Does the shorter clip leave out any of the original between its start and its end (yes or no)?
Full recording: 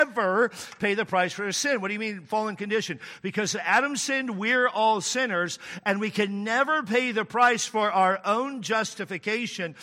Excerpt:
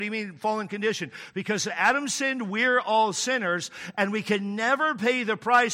no